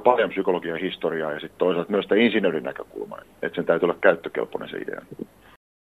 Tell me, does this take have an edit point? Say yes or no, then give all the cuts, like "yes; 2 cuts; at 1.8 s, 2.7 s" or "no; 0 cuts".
yes; 1 cut; at 3.2 s